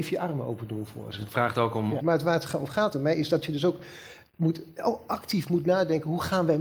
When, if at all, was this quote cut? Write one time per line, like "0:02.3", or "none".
0:02.0